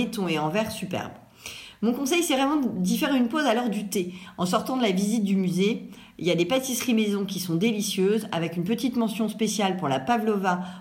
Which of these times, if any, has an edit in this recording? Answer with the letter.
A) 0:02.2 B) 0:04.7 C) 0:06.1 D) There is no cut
D